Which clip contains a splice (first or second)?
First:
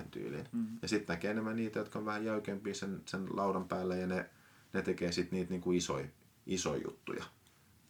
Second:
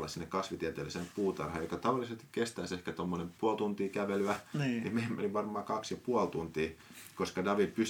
second